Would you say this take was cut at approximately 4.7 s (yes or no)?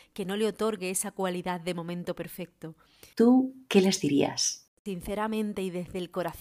no